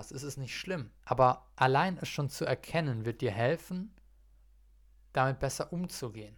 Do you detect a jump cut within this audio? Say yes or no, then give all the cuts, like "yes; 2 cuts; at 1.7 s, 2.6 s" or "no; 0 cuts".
yes; 1 cut; at 1.0 s